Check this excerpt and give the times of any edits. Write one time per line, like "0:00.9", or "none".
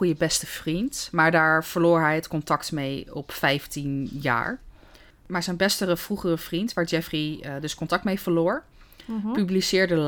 0:05.1